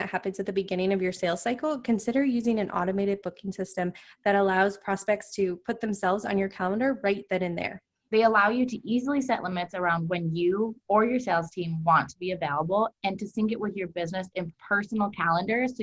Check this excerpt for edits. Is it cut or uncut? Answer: cut